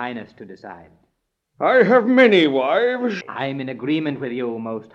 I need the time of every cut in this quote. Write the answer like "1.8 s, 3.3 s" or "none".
3.2 s

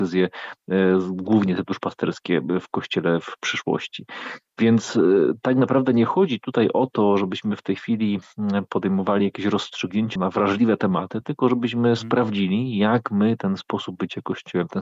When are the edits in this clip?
10.2 s

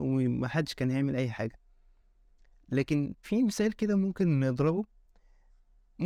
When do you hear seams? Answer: 3.2 s

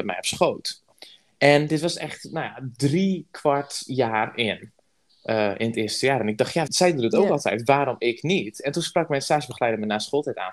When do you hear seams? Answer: 6.7 s

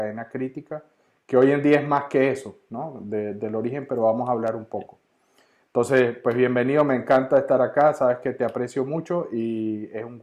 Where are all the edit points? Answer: none

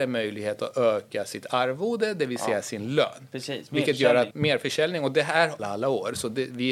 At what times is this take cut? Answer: 4.3 s, 5.6 s

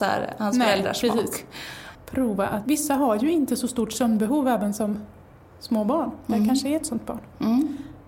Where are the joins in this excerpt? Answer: 1.9 s

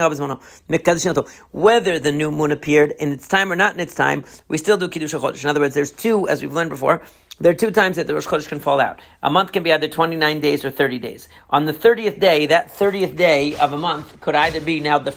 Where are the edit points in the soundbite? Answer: none

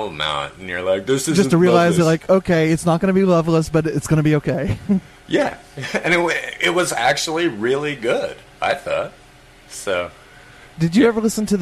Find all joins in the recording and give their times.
none

